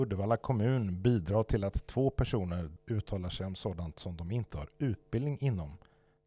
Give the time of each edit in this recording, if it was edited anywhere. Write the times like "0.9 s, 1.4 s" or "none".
2.8 s